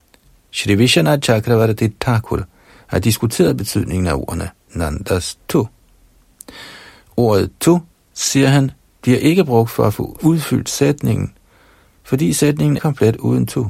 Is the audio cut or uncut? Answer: cut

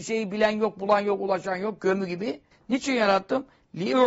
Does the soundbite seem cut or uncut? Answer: cut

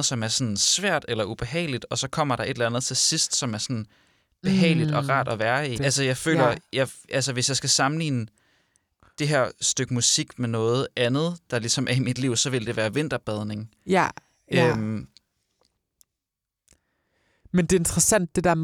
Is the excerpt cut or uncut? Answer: cut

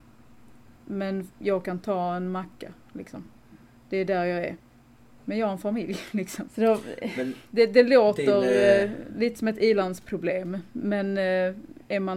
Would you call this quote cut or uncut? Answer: cut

